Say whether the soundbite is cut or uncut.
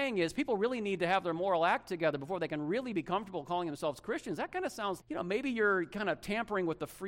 cut